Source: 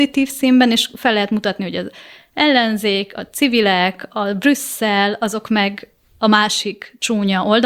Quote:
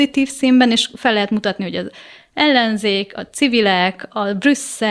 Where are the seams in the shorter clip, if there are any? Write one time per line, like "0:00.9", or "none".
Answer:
none